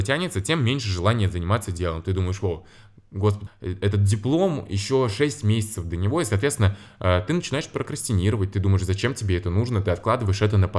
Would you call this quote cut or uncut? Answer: cut